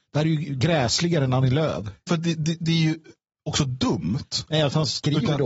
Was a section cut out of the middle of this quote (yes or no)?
yes